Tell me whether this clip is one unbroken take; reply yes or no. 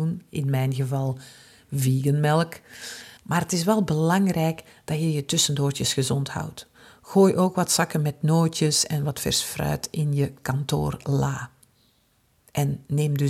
no